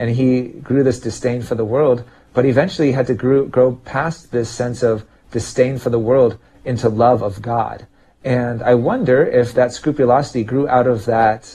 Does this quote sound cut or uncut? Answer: uncut